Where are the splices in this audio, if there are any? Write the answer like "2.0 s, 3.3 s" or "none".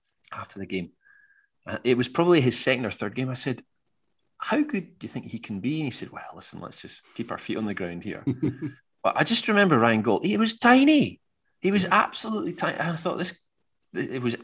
none